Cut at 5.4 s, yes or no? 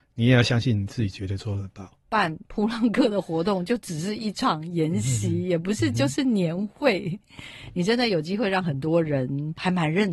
no